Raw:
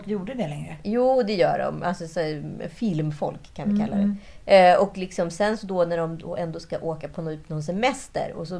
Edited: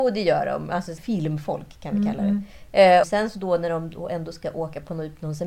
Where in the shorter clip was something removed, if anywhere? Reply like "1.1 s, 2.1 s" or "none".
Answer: 1.0 s, 3.0 s